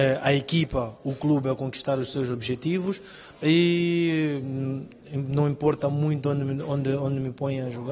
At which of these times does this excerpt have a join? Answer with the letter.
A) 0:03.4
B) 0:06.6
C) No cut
C